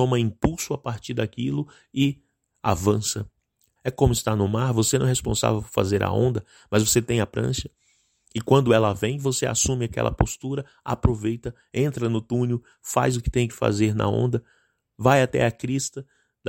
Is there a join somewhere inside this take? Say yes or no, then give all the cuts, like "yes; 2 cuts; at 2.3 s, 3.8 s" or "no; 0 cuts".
yes; 1 cut; at 3.8 s